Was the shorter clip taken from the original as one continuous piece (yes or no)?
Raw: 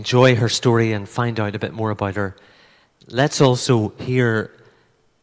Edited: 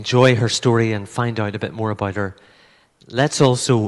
yes